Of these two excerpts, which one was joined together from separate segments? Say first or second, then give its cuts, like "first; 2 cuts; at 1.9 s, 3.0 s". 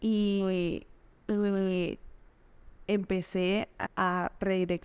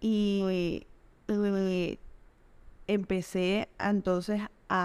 first; 1 cut; at 3.8 s